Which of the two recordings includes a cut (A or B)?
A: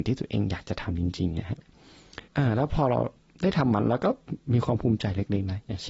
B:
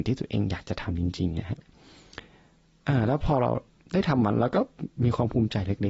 A